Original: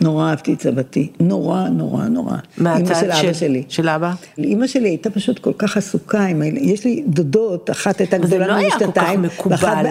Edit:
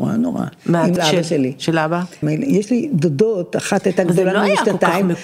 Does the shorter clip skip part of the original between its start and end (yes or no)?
yes